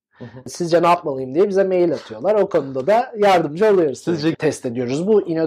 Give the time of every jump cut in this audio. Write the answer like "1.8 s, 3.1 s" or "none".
4.3 s